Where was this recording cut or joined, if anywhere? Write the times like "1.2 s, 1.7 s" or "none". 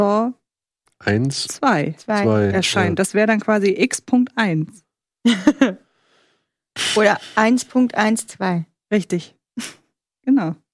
none